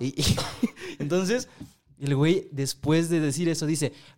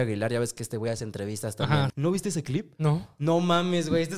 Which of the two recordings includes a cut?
second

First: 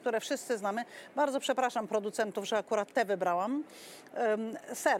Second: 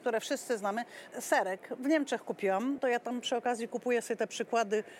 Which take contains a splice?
second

